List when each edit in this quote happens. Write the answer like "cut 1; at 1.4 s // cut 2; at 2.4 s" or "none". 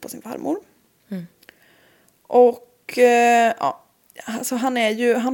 none